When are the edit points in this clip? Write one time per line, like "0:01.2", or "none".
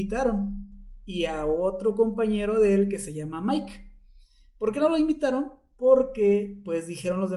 none